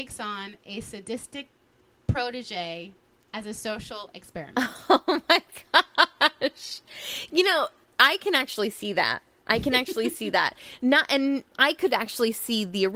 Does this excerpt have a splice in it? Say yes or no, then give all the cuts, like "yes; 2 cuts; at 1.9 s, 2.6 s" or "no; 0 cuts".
no; 0 cuts